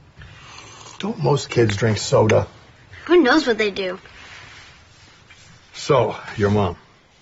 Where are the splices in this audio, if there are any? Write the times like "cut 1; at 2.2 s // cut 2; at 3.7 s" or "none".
none